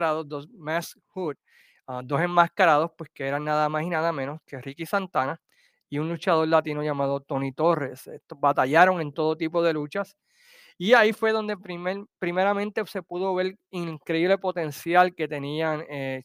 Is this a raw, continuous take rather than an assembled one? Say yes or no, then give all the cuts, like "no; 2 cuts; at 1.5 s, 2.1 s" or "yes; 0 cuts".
no; 1 cut; at 1.0 s